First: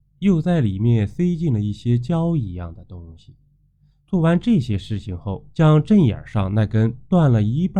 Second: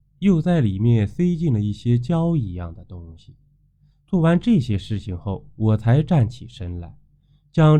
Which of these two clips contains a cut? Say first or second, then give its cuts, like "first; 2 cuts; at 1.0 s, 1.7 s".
first; 1 cut; at 5.5 s